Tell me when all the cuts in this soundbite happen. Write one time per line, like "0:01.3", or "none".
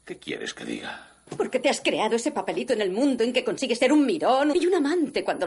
0:01.3
0:04.5